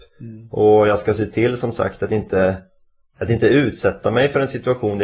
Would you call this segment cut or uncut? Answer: uncut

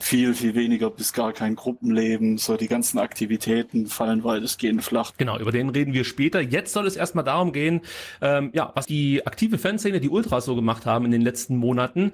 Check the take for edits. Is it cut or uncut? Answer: cut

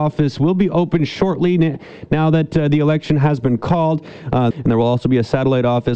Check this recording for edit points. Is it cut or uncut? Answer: cut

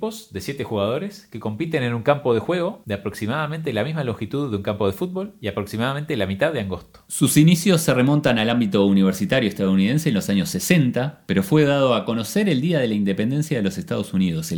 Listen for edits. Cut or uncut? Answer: uncut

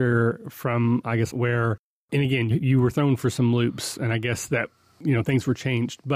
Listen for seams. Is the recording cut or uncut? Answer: cut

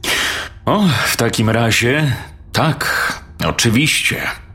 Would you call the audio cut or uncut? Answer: uncut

